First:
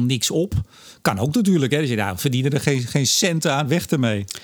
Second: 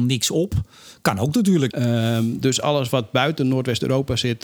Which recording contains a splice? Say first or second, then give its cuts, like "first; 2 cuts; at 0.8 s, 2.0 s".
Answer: second; 1 cut; at 1.7 s